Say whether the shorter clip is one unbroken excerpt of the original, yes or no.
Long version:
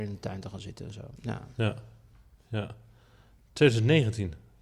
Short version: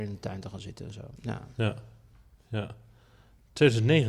yes